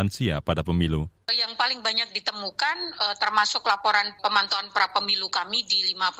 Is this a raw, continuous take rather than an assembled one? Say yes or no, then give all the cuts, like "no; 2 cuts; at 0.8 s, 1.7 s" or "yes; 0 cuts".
no; 1 cut; at 1.3 s